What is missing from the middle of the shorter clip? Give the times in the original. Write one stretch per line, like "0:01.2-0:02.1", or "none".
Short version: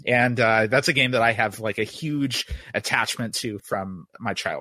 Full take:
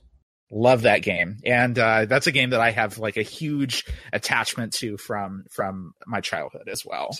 0:05.0-0:05.5